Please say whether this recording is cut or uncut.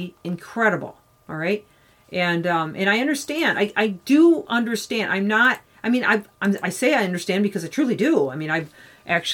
uncut